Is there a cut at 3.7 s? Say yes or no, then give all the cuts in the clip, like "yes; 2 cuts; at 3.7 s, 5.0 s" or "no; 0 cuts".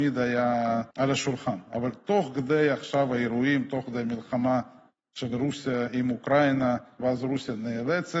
no; 2 cuts; at 0.9 s, 7.0 s